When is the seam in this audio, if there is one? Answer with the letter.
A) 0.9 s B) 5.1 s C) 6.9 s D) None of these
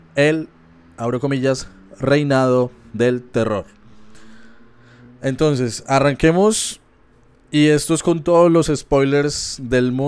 D